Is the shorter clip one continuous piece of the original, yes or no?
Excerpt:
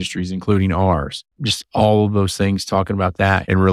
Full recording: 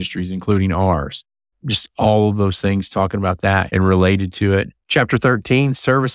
no